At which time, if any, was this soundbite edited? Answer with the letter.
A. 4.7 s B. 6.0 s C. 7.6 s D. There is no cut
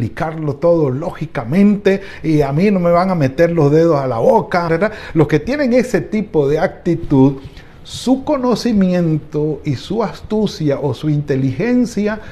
A